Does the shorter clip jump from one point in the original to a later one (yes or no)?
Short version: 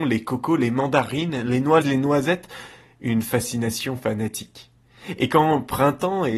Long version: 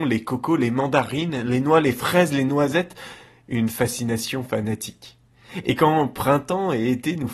yes